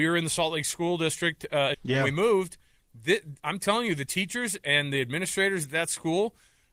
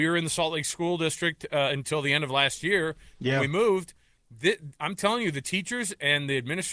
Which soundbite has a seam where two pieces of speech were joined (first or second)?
first